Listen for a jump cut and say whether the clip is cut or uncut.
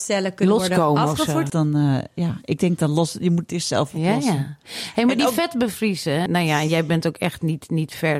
cut